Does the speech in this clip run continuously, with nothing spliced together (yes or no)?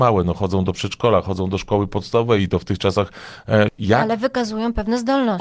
no